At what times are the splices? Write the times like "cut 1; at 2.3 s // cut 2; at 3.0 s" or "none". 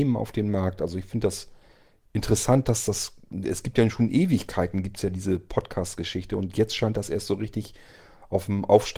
none